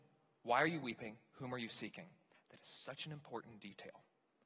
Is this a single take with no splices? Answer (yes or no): no